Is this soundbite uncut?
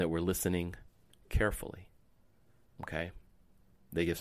no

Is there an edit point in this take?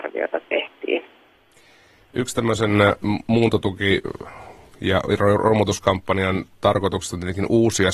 no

